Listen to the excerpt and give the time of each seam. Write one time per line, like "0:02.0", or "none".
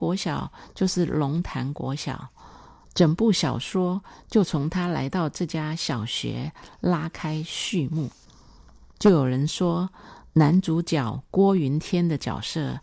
0:02.8